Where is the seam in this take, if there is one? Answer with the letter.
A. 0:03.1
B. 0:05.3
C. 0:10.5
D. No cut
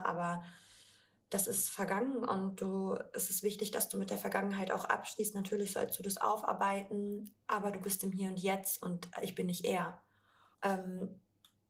C